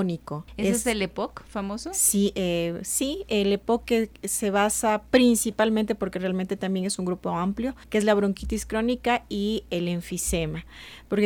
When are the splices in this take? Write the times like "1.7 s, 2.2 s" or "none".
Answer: none